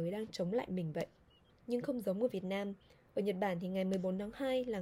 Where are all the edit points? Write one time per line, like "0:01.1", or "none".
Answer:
0:01.5